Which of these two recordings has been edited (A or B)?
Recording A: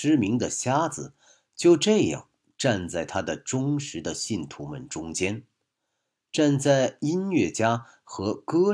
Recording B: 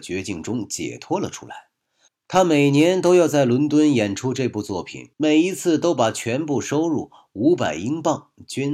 B